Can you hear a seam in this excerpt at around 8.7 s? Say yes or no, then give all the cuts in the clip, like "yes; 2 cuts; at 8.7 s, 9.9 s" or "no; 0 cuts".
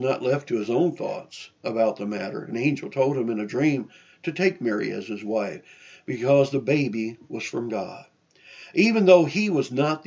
no; 0 cuts